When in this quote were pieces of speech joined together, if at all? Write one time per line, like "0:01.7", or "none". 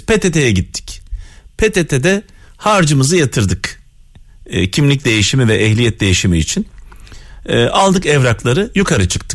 none

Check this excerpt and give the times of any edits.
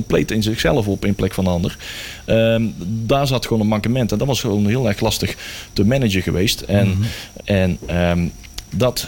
0:07.4

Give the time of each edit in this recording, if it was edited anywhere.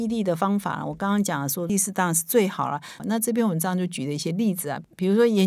0:01.7
0:03.0

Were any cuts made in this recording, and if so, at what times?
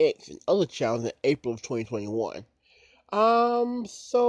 none

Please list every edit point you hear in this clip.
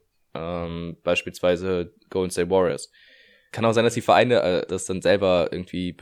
0:03.5
0:04.7

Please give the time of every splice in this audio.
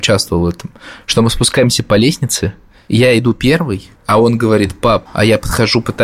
0:04.0
0:05.1

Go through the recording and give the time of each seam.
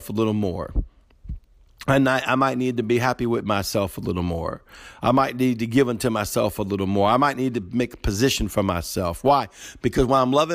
none

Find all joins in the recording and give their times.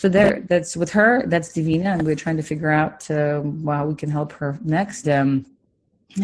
0:05.0

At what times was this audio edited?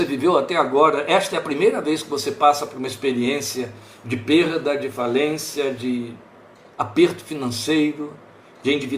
none

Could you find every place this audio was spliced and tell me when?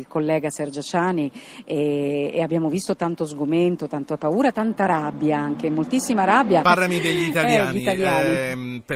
0:06.6

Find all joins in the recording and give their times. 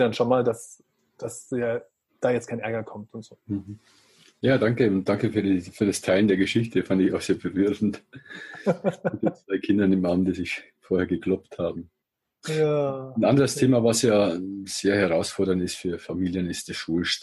none

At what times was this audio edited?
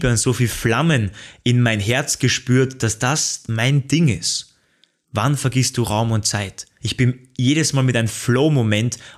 0:05.0
0:06.8

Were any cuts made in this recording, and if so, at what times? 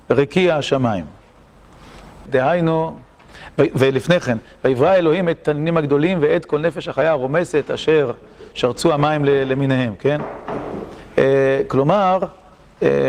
0:02.3

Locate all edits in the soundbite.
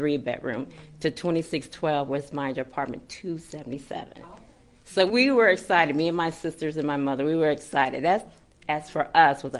0:05.1

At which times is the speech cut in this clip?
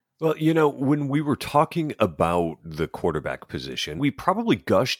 0:04.0

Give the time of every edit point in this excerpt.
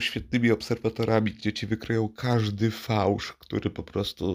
none

